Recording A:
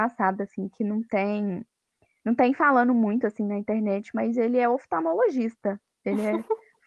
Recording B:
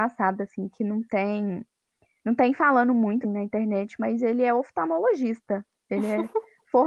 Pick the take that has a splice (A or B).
B